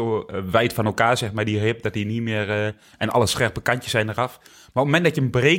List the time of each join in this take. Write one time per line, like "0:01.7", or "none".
none